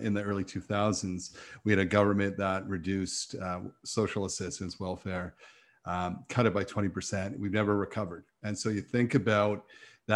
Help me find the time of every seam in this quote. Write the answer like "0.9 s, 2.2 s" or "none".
none